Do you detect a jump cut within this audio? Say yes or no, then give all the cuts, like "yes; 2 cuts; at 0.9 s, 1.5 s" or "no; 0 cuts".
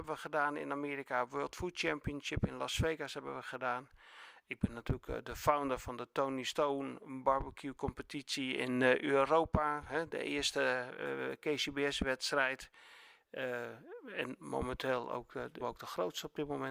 yes; 1 cut; at 15.6 s